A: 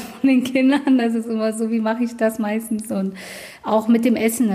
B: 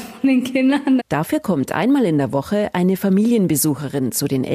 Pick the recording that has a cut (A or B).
B